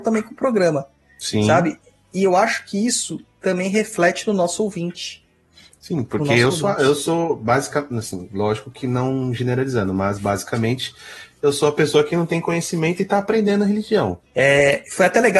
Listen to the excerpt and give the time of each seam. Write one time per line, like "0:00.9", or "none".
0:14.3